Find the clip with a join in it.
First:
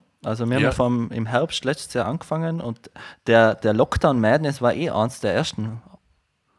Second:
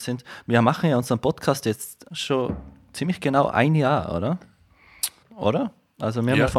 second; 2 cuts; at 2.1 s, 5.2 s

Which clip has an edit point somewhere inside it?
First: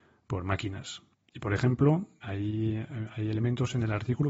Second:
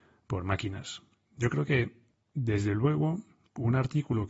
first; 1 cut; at 1.1 s

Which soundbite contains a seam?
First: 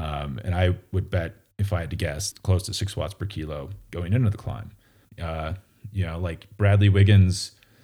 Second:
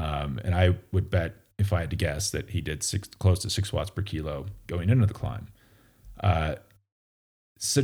first; 2 cuts; at 2.3 s, 5.0 s

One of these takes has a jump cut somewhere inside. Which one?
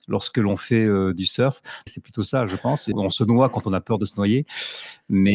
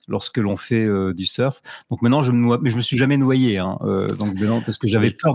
first; 2 cuts; at 1.9 s, 2.9 s

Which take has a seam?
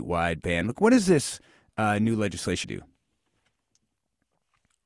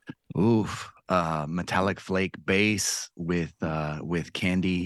first; 1 cut; at 2.6 s

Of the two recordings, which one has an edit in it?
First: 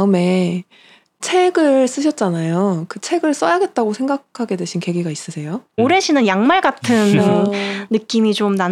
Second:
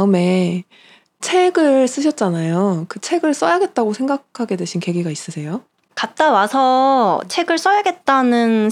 first; 1 cut; at 5.8 s

